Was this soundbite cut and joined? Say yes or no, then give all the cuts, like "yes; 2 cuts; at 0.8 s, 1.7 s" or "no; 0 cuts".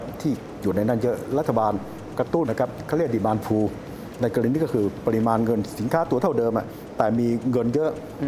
yes; 1 cut; at 2.4 s